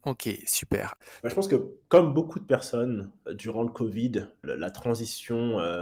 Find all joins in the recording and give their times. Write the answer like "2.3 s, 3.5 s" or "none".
1.2 s, 3.3 s, 4.4 s